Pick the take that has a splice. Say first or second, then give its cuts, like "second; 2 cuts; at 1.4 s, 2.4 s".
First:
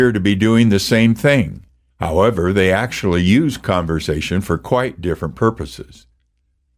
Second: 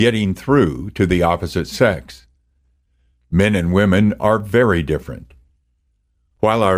first; 1 cut; at 1.9 s